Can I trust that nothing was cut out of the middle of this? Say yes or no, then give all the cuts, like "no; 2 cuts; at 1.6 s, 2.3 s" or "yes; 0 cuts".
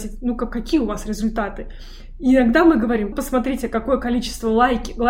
no; 1 cut; at 3.1 s